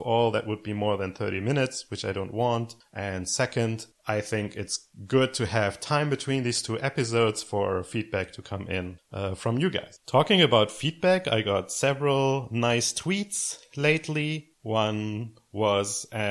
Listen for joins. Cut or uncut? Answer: uncut